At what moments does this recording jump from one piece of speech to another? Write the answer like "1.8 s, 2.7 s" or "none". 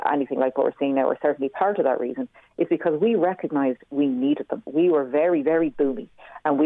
4.7 s